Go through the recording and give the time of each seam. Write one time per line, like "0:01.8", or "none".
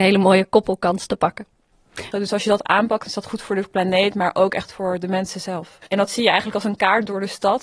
0:02.1
0:05.9